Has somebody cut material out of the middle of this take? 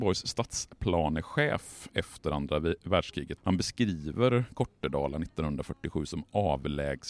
yes; 1 cut; at 3.4 s

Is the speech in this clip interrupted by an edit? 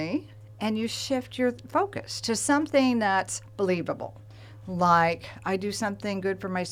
no; 0 cuts

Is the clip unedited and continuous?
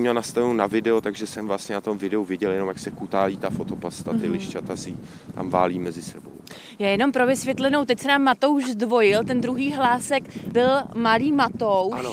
yes; 0 cuts

